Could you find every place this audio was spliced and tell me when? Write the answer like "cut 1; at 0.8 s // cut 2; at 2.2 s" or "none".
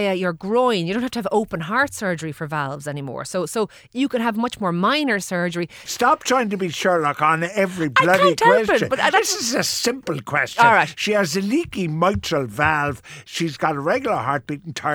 cut 1; at 5.9 s